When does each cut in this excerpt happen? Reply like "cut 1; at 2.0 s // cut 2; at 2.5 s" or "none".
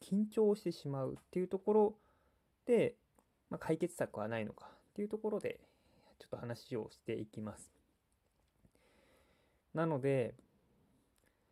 cut 1; at 9.6 s